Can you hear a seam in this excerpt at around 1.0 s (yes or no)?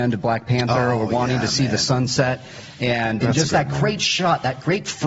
no